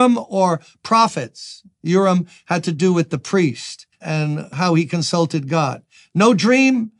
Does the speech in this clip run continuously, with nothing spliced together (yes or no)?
yes